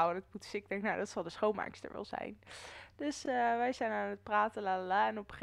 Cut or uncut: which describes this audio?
uncut